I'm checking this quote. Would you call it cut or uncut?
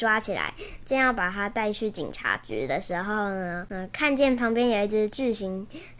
uncut